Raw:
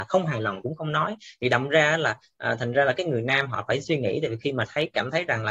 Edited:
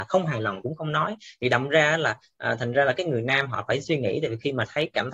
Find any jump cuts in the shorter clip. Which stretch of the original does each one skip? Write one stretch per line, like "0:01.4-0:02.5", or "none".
none